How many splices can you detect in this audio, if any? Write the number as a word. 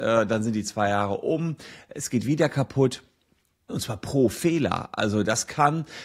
one